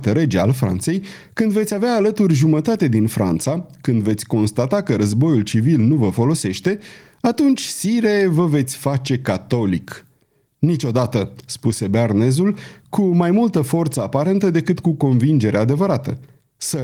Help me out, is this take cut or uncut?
uncut